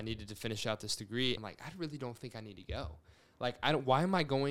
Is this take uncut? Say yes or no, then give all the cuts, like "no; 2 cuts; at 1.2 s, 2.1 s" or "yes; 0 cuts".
no; 1 cut; at 1.4 s